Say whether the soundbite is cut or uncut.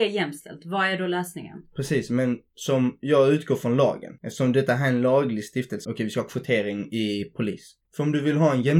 cut